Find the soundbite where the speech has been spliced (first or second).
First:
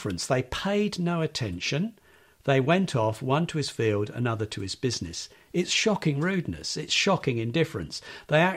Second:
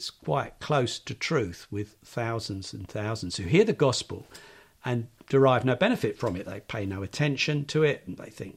second